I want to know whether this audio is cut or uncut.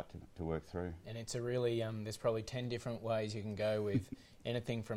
uncut